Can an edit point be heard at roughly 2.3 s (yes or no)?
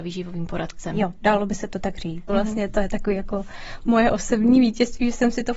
yes